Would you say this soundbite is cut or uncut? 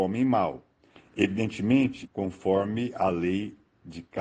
cut